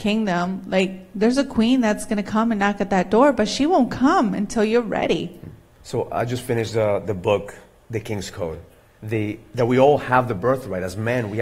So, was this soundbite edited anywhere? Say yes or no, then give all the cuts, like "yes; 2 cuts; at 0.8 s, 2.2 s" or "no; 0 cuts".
yes; 2 cuts; at 5.8 s, 9.0 s